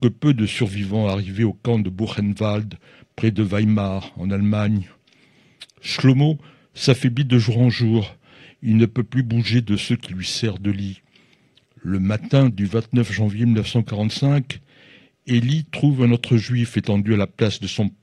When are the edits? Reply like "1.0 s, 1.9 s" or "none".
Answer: none